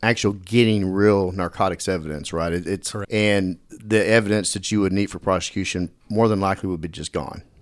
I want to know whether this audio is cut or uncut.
cut